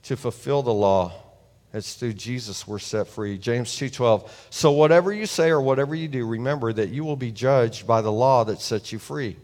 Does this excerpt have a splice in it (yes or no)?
no